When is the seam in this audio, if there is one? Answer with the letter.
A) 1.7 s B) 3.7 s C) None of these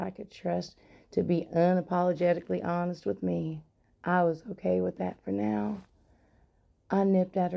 C